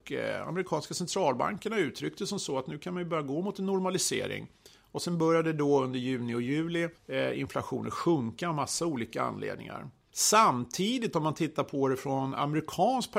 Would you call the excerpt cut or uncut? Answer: cut